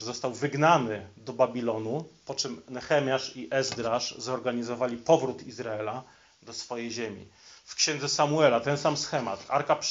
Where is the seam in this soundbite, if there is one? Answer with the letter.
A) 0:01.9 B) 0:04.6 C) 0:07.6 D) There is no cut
D